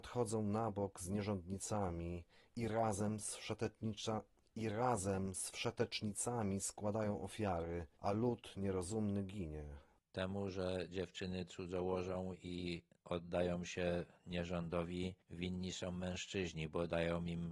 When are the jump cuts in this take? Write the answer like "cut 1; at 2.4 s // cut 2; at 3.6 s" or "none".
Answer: cut 1; at 7.9 s